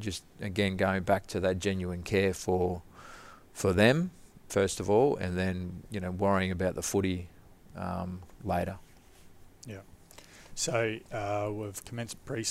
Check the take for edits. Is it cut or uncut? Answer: uncut